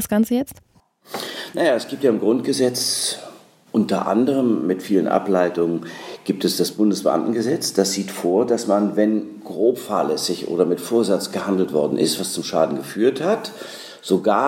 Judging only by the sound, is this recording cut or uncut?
uncut